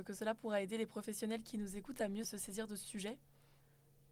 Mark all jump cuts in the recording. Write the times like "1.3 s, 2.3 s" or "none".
2.2 s